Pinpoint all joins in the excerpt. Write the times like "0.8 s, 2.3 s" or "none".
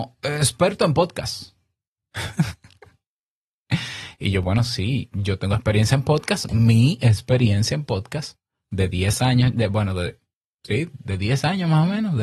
none